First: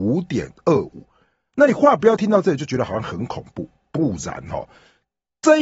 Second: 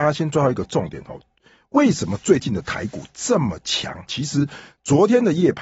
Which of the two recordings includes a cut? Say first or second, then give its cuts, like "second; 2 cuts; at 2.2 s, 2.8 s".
second; 1 cut; at 4.1 s